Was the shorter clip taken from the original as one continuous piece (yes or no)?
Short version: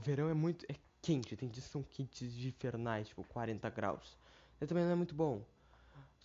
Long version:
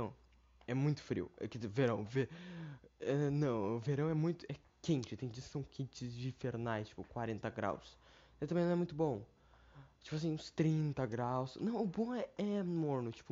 yes